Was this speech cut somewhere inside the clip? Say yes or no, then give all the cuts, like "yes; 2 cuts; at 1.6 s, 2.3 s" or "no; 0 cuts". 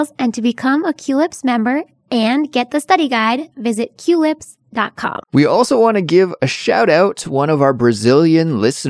yes; 1 cut; at 5.2 s